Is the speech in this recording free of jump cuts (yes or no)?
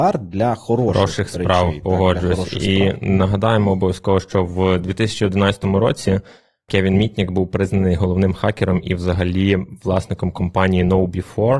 yes